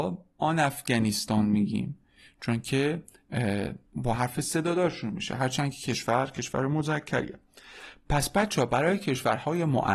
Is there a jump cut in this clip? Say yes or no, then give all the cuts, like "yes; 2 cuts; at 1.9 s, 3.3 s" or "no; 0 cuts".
yes; 1 cut; at 3.9 s